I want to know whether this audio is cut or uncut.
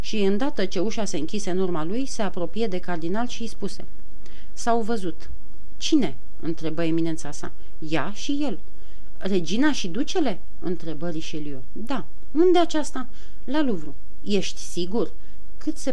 uncut